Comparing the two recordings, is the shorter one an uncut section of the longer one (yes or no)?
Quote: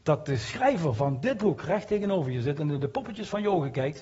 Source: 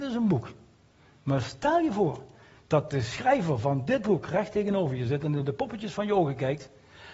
yes